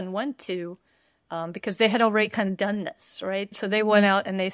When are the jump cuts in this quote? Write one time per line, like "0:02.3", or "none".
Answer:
0:03.5